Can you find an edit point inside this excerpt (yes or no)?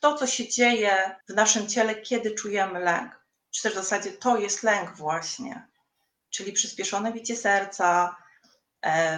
yes